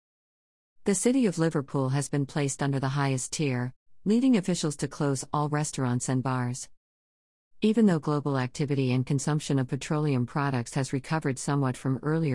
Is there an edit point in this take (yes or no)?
no